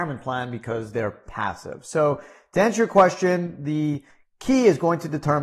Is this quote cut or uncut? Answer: uncut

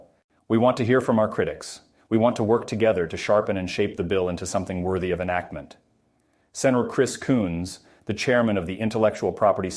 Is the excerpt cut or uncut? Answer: uncut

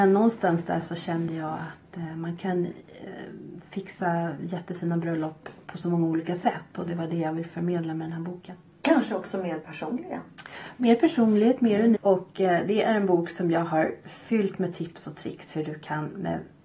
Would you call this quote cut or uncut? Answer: cut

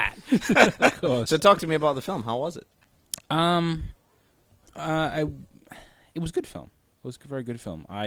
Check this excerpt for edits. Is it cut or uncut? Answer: uncut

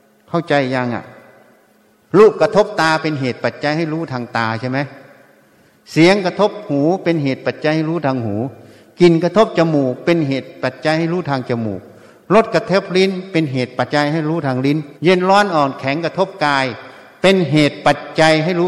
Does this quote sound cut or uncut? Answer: cut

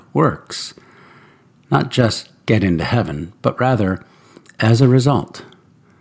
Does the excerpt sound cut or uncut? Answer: uncut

